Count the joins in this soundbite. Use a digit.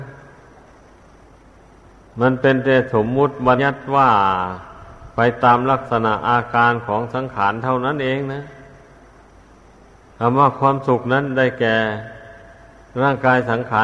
1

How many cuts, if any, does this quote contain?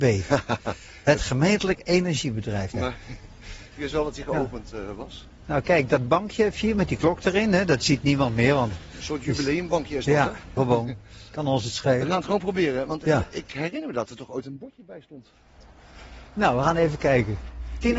2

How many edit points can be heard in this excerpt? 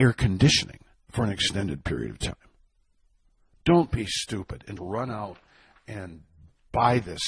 1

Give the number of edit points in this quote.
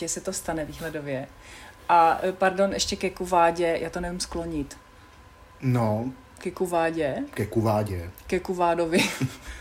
0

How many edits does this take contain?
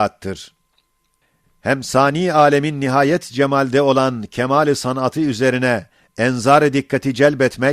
1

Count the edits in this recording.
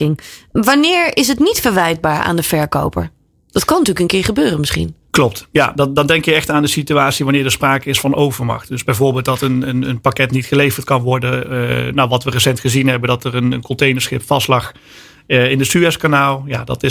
0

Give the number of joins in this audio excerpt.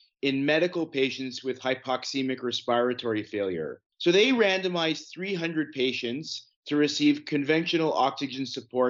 1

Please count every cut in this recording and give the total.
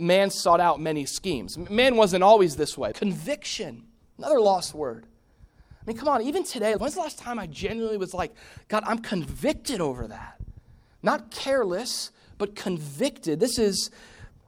2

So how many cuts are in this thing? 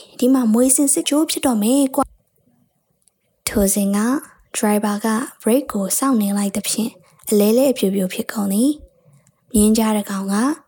1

